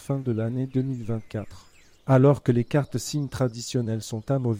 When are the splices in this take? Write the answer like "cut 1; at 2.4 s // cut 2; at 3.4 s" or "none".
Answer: cut 1; at 1.9 s